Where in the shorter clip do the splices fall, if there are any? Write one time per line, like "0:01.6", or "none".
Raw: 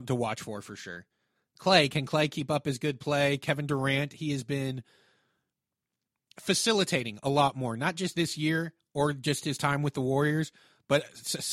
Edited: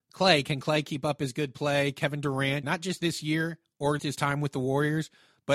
0:02.6
0:04.0